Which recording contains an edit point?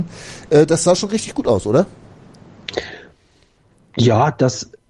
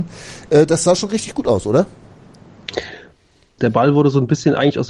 second; 1 cut; at 3.6 s

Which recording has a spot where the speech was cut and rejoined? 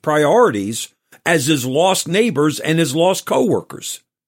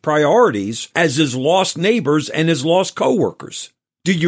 second; 1 cut; at 0.9 s

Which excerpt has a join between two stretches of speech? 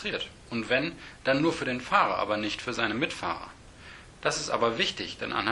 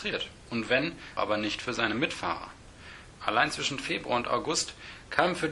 second; 2 cuts; at 1.2 s, 3.2 s

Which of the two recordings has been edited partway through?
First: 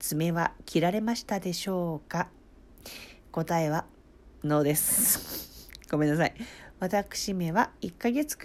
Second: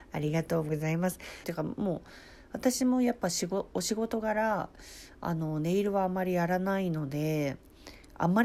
second; 1 cut; at 1.4 s

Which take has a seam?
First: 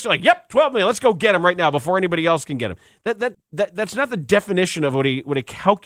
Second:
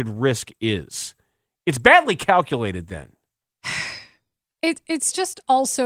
first; 1 cut; at 3.3 s

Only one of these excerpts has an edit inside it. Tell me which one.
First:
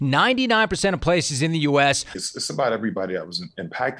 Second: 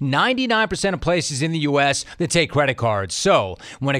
first; 1 cut; at 2.1 s

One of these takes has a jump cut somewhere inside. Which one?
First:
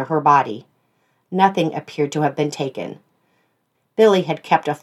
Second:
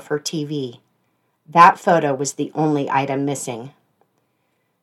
first; 1 cut; at 3.7 s

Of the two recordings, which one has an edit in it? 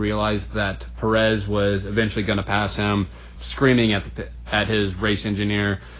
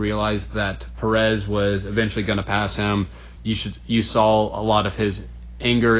first; 1 cut; at 3.4 s

